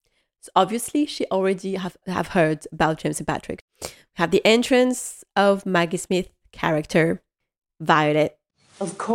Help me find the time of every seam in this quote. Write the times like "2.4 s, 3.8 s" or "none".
2.0 s, 3.7 s